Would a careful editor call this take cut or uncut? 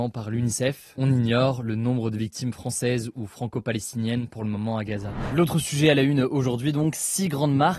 uncut